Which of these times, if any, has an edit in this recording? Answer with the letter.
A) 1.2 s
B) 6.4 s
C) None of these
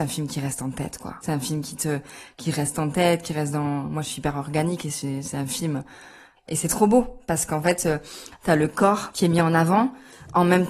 B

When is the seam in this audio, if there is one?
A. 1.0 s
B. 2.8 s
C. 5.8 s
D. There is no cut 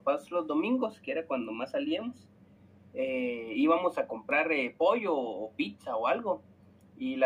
D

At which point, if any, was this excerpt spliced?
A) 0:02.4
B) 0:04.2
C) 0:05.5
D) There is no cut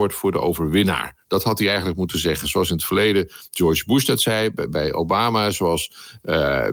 D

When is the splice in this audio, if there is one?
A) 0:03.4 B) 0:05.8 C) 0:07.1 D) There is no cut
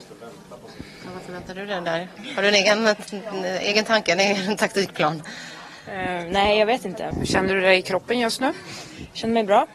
C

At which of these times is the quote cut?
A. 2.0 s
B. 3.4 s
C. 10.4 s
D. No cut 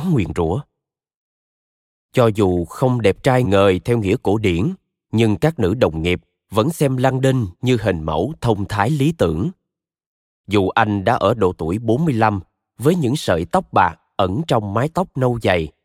B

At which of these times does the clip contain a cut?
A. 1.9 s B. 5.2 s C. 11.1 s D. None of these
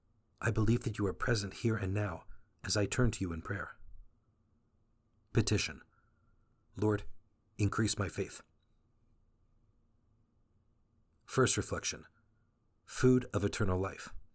B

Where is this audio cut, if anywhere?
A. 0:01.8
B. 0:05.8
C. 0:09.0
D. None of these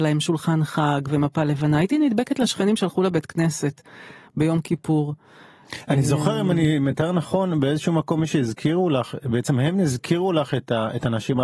D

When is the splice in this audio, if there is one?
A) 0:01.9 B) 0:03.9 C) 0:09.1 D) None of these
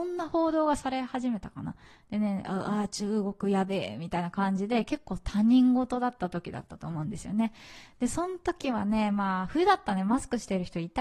D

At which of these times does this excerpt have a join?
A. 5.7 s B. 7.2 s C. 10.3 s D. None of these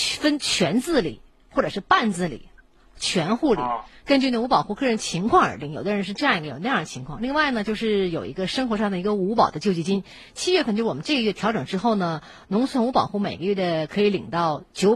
D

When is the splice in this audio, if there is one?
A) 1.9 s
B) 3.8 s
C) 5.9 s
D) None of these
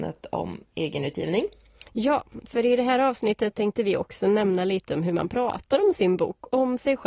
D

